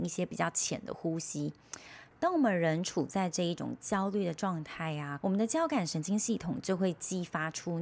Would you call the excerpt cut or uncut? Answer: cut